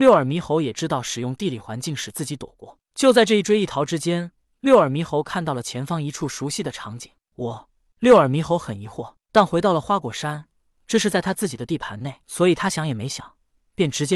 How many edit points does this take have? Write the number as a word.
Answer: two